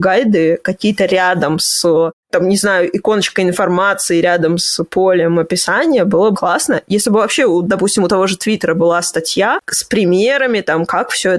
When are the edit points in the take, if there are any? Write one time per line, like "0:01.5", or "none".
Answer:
0:06.3